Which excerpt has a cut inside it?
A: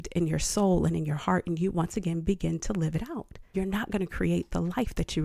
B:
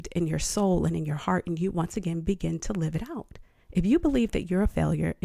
A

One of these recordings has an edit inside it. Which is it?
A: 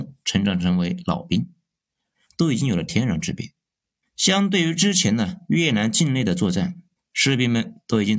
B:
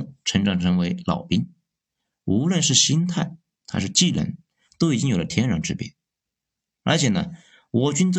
A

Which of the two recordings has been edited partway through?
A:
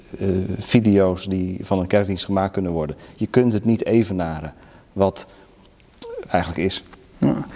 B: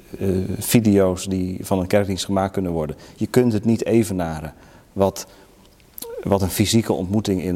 A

